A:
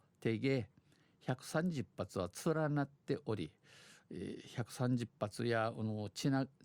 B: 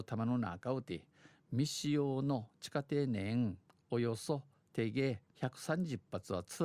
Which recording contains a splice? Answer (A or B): B